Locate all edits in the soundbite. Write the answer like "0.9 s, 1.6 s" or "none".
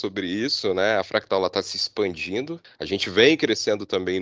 2.6 s